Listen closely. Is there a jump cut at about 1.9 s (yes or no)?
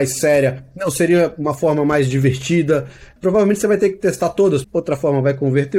no